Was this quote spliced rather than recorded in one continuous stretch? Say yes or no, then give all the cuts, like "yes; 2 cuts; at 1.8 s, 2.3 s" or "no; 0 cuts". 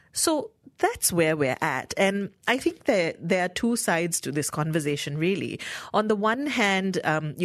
no; 0 cuts